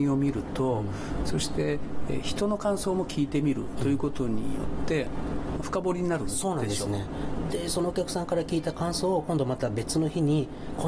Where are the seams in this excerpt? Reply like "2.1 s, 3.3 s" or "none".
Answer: 1.2 s, 5.6 s